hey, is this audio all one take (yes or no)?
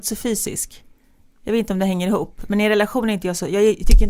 yes